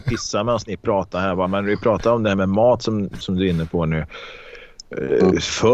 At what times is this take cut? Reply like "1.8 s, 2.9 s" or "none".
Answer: 3.2 s